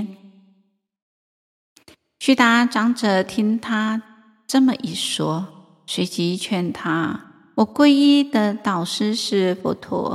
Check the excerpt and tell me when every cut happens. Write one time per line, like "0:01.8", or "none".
none